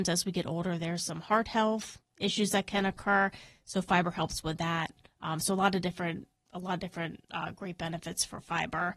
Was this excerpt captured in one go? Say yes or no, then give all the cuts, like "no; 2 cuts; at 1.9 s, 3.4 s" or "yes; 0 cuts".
yes; 0 cuts